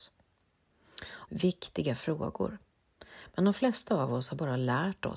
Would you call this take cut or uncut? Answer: cut